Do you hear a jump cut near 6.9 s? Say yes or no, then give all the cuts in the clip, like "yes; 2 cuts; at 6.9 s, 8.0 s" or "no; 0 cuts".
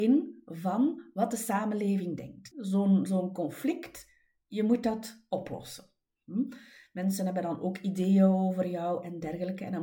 no; 1 cut; at 2.5 s